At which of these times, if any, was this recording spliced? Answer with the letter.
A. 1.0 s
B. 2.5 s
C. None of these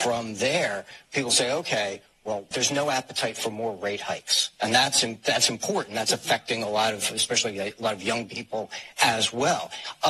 B